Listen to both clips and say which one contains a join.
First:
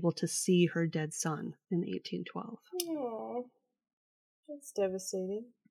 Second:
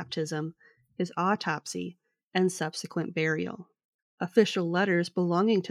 second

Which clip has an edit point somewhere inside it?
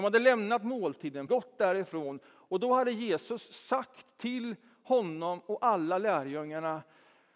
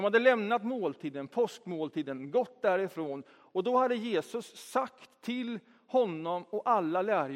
first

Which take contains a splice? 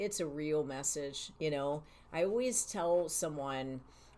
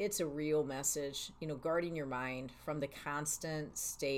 first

